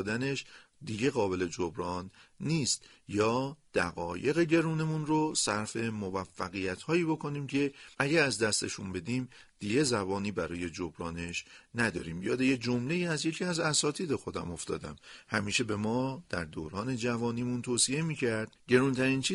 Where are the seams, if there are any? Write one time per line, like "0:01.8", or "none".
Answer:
0:07.9